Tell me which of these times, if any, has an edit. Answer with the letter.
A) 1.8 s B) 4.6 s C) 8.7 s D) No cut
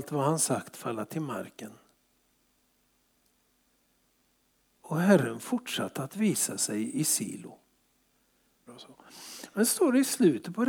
C